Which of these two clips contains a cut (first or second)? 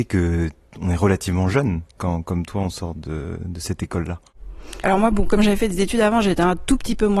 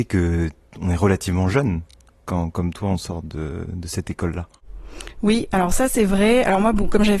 first